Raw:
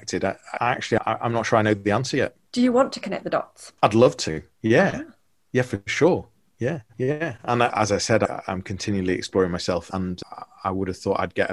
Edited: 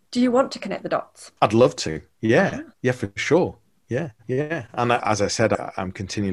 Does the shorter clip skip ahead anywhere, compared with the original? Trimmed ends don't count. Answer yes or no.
yes